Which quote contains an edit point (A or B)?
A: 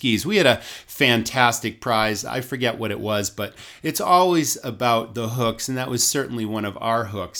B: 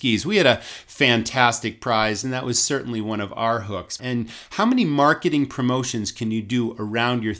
B